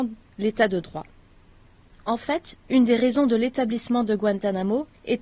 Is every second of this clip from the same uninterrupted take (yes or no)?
yes